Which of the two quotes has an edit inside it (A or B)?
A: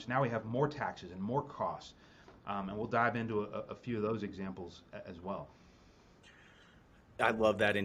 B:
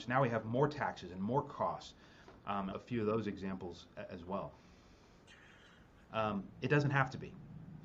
B